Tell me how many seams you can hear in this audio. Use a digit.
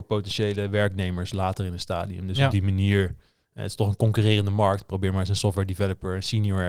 0